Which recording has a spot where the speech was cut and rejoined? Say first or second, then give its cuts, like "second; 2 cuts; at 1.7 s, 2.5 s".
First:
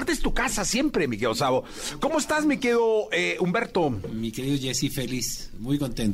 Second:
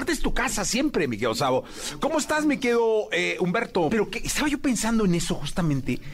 second; 1 cut; at 3.9 s